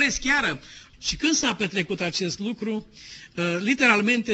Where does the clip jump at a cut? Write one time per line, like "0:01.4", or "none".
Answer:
0:00.9